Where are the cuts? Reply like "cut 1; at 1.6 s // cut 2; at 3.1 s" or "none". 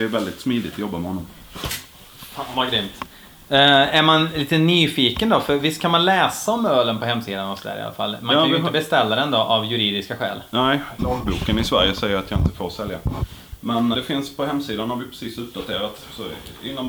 cut 1; at 11.0 s // cut 2; at 13.9 s